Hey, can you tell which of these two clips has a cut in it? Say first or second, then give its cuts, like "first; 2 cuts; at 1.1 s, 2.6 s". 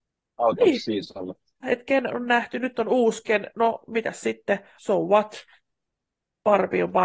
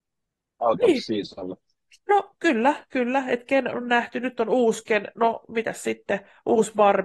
first; 2 cuts; at 1.6 s, 4.8 s